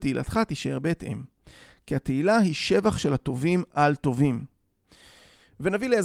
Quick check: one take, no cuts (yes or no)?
yes